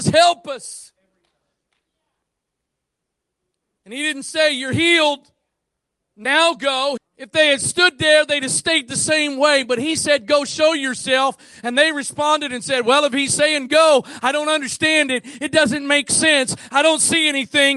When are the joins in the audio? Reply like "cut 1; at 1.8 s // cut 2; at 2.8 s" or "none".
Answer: cut 1; at 7.0 s